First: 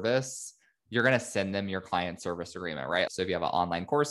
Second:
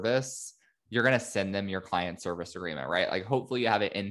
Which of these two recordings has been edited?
first; 1 cut; at 3.1 s

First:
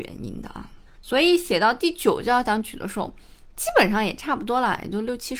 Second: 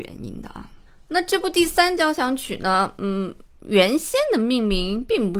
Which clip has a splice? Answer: first; 1 cut; at 0.9 s

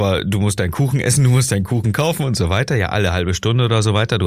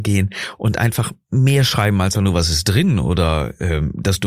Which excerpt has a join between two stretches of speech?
second; 1 cut; at 2.1 s

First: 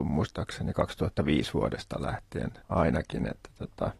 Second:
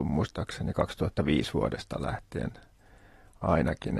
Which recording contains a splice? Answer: first; 1 cut; at 2.6 s

